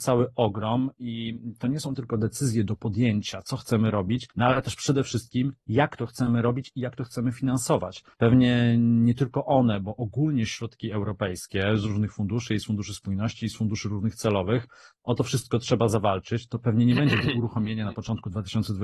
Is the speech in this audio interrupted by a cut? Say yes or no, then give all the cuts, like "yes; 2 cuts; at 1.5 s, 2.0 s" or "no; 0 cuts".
yes; 2 cuts; at 4.3 s, 8.1 s